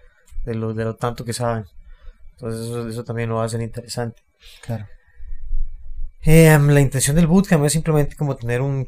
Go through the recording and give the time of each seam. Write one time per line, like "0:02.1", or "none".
none